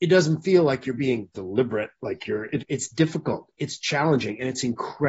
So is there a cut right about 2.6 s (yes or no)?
yes